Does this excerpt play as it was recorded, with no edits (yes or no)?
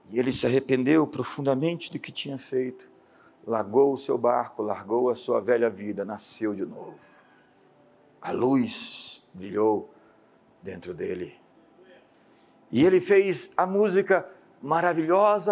yes